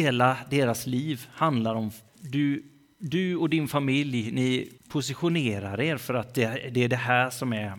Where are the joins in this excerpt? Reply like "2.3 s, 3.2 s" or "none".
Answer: 2.1 s, 4.8 s